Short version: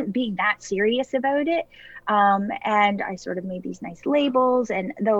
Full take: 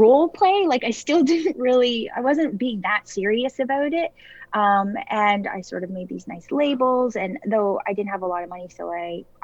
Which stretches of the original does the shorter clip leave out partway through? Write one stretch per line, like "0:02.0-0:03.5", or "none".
none

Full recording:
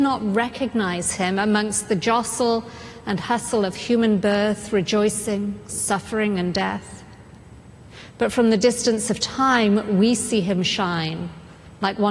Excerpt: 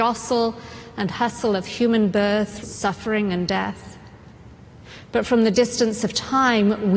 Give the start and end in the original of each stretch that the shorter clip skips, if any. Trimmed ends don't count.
0:04.7-0:05.7

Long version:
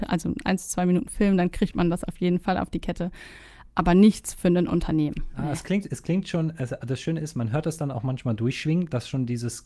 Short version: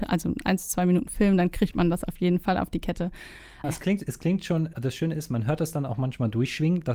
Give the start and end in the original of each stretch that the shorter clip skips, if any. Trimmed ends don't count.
0:03.6-0:05.5
0:06.6-0:06.8

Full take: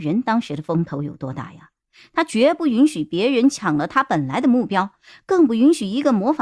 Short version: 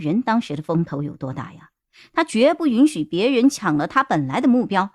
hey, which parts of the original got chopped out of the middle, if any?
none

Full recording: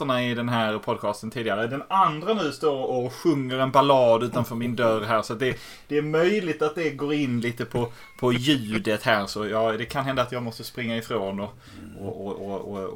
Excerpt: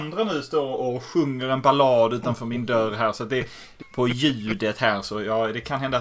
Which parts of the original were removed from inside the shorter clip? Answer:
0:05.9-0:08.1

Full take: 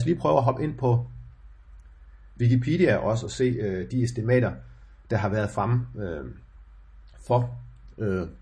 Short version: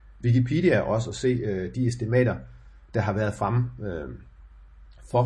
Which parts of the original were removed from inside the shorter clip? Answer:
none

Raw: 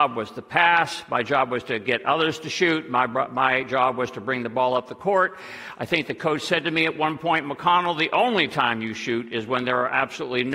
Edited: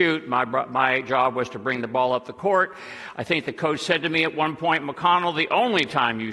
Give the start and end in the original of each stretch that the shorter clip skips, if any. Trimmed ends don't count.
none

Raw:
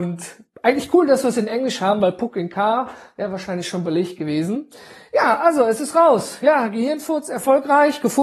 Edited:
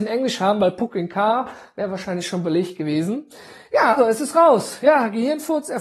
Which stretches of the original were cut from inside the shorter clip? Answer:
0:05.4-0:05.6

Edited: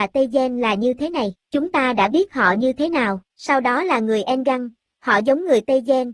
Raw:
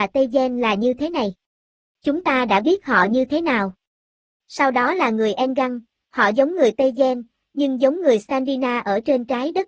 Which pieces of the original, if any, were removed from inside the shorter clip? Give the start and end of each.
0:01.4-0:01.9
0:03.8-0:04.4

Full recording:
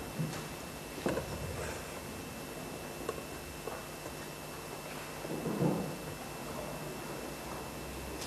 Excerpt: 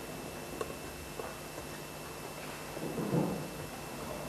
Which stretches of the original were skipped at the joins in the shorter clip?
none

